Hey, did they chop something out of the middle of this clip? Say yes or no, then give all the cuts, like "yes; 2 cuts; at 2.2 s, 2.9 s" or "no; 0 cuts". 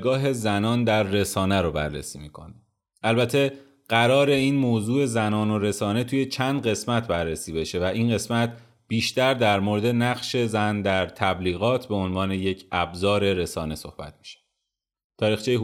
no; 0 cuts